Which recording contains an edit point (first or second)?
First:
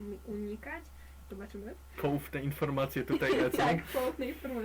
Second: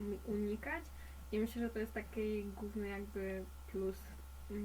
first